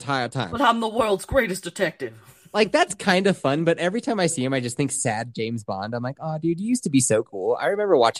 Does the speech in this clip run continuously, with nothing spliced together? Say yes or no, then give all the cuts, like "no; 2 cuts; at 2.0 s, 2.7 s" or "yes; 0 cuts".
yes; 0 cuts